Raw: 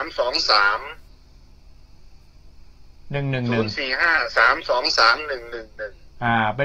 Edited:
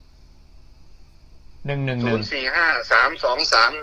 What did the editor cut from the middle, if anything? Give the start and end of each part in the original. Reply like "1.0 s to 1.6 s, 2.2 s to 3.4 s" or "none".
2.7 s to 3.0 s

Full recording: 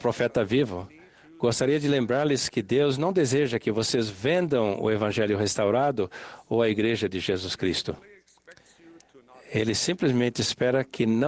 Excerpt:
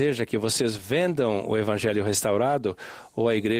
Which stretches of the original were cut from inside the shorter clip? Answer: none

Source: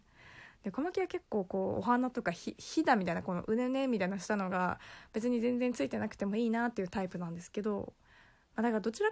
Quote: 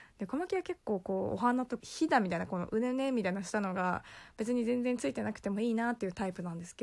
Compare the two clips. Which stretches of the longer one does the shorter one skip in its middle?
2.2 s to 2.6 s

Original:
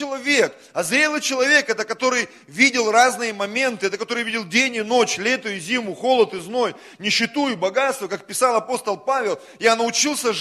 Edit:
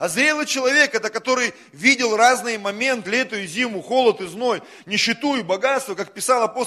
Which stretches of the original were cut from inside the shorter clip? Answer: 3.8 s to 5.2 s

